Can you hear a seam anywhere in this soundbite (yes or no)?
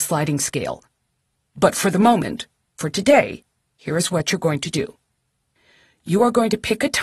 no